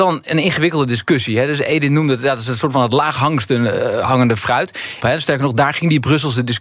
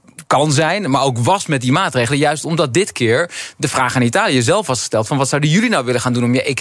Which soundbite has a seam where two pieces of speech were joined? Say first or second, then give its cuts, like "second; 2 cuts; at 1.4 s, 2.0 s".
first; 1 cut; at 5.0 s